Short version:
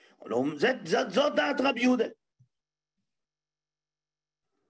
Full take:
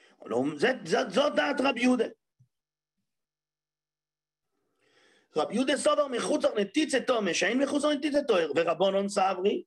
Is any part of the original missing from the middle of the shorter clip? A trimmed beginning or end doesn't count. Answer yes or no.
no